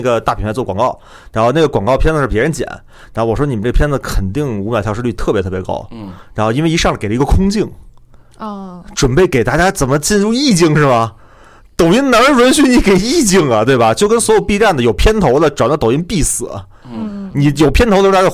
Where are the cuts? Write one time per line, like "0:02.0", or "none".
none